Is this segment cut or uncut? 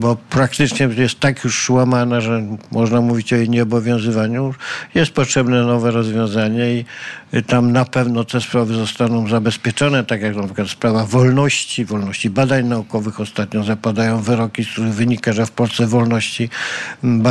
uncut